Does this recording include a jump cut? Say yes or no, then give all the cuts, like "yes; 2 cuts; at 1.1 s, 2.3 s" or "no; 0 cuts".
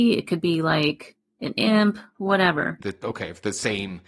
yes; 1 cut; at 2.8 s